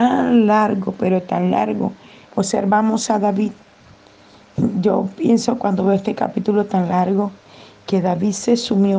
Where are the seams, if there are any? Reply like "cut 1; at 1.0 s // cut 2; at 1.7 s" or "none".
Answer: cut 1; at 2.2 s